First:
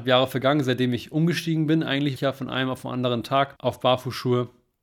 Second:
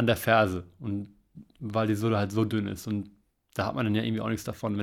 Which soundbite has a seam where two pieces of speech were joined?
first; 2 cuts; at 2.2 s, 3.6 s

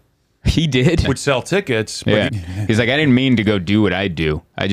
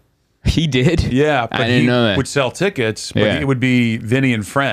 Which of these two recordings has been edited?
first; 2 cuts; at 1.0 s, 2.3 s

